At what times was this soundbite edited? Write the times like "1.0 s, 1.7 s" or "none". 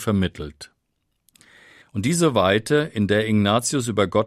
1.8 s